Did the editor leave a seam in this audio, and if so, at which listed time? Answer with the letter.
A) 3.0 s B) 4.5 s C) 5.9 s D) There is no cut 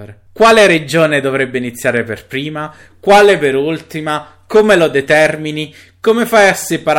D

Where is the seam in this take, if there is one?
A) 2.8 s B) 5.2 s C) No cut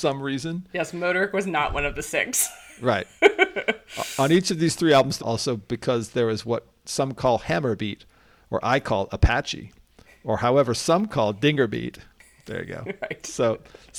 B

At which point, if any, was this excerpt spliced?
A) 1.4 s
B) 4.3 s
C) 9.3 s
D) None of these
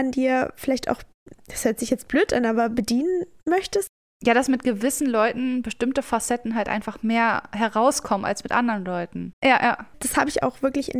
C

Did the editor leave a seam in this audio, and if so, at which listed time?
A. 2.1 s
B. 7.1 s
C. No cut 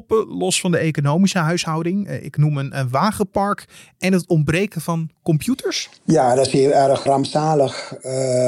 B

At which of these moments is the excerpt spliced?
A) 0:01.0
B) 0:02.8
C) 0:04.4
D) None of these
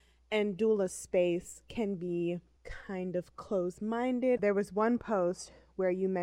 C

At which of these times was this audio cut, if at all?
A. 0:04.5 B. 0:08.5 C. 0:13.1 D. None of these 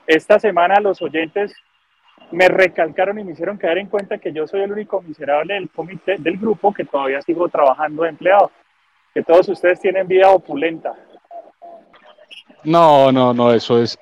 D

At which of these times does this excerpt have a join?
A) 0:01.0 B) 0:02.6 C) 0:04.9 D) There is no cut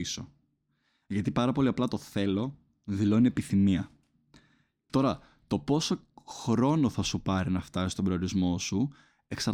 C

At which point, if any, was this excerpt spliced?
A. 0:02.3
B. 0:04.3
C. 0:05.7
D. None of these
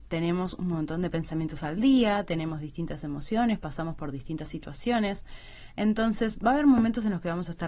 D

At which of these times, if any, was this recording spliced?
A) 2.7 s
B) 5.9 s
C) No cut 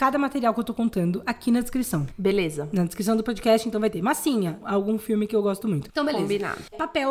B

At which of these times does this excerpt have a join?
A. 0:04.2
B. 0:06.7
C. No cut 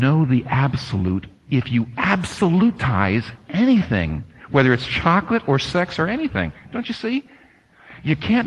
C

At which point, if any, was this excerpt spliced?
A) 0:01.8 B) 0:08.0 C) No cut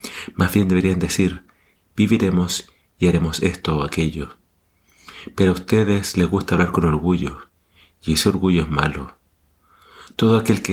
A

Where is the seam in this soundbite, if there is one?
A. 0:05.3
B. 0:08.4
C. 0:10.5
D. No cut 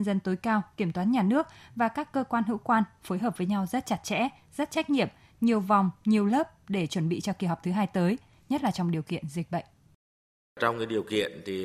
D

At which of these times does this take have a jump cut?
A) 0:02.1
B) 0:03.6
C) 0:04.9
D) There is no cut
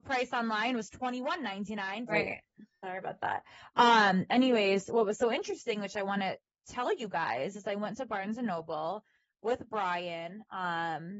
A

